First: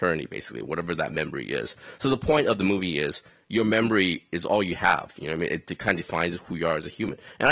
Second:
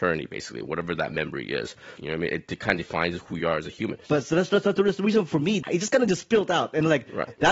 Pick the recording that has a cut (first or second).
second